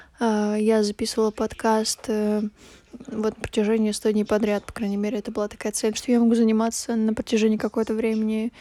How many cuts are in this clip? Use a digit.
1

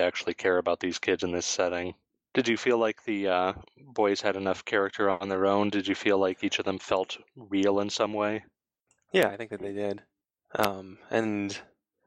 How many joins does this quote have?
1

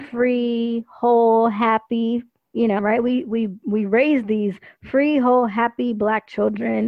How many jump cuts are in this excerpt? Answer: 1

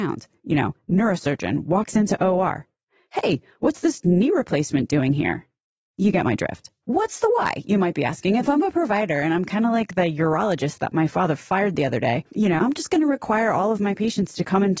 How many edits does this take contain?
1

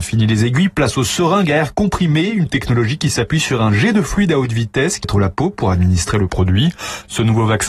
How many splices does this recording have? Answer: 1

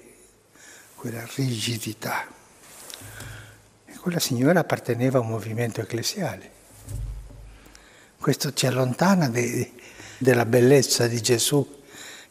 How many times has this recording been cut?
2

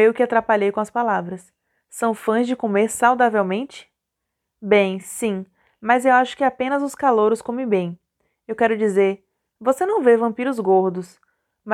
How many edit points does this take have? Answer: 0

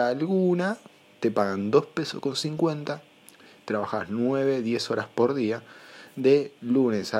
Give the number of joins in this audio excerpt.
0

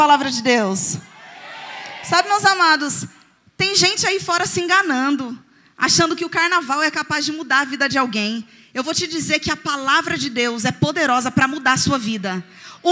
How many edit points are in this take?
0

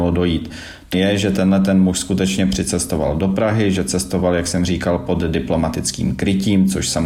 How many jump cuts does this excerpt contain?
1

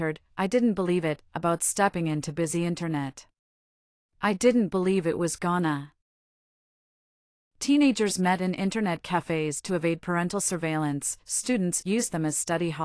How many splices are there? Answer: 1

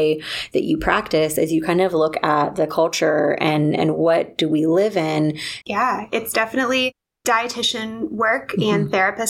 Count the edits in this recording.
1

